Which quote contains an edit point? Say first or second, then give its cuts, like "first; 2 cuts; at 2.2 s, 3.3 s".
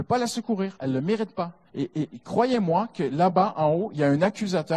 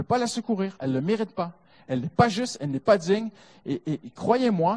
first; 1 cut; at 1.7 s